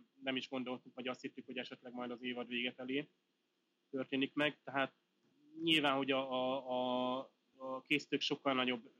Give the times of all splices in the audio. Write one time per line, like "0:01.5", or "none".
none